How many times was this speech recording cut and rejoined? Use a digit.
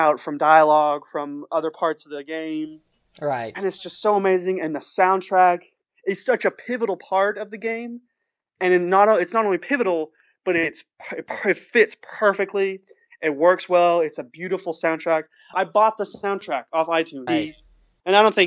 2